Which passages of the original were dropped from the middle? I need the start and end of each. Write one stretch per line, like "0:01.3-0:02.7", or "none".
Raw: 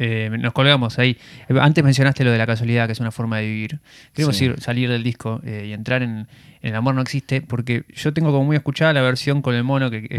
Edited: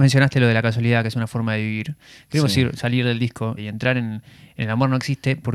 0:05.4-0:05.6